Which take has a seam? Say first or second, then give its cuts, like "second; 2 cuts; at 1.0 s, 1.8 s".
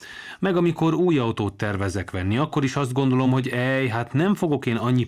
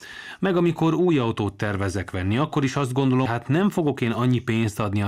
second; 1 cut; at 3.3 s